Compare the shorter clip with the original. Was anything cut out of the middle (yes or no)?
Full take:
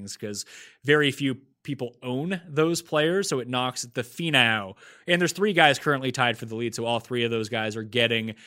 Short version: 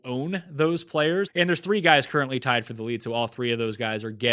yes